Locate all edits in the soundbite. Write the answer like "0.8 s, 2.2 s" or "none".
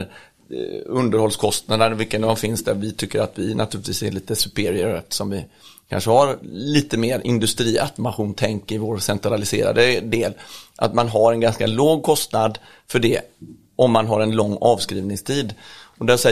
none

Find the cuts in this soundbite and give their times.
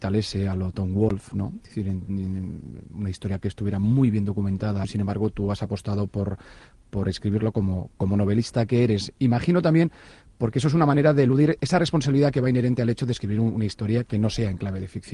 4.8 s

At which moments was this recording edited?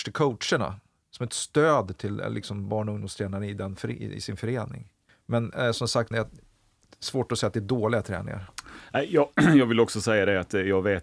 5.1 s, 6.1 s

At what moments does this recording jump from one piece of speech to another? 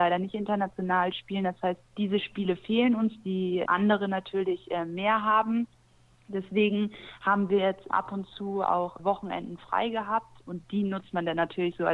none

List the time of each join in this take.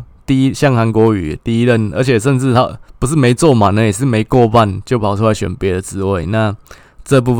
none

